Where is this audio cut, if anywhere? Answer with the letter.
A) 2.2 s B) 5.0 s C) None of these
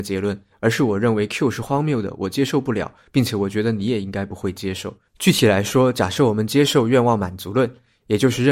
B